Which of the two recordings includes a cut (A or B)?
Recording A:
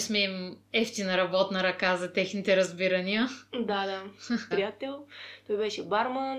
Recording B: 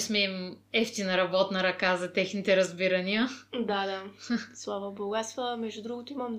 A